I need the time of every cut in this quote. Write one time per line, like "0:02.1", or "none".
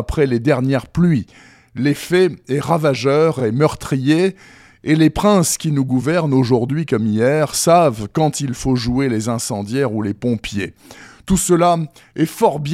none